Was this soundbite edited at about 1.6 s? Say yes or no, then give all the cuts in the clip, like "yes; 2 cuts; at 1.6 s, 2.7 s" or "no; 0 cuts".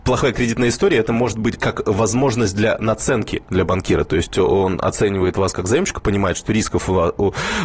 yes; 1 cut; at 1.6 s